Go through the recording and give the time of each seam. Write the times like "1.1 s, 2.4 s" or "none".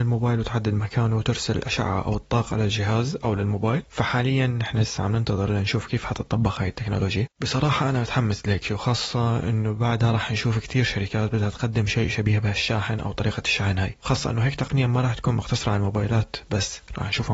7.3 s

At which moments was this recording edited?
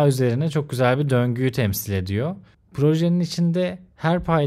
2.5 s

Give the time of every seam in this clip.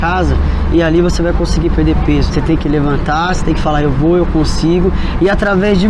2.3 s

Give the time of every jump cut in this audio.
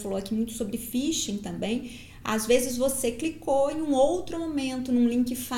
none

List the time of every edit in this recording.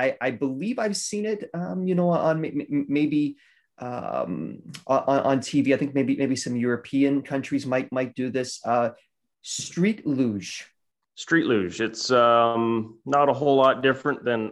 none

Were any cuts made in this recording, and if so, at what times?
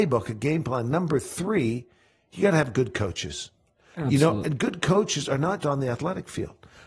4.4 s, 5.6 s

